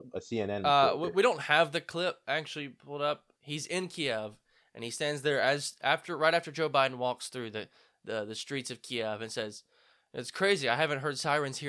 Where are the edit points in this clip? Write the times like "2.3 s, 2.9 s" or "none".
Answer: 3.3 s

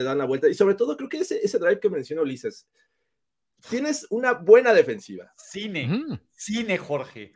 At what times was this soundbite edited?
none

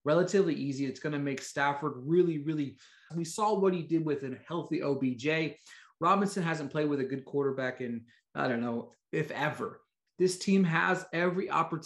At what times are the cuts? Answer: 3.1 s, 10.1 s

